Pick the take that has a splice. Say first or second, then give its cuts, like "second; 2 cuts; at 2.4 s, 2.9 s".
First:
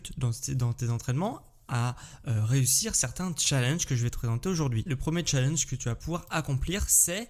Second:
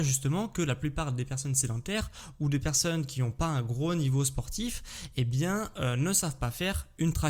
first; 1 cut; at 4.9 s